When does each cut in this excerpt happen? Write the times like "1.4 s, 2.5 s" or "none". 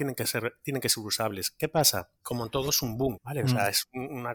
2.2 s, 3.2 s